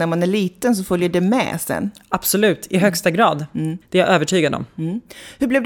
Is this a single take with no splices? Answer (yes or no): no